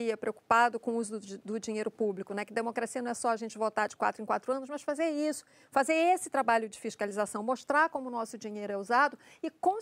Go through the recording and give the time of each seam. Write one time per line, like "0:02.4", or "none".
none